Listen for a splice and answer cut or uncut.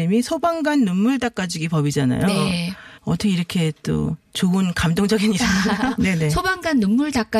cut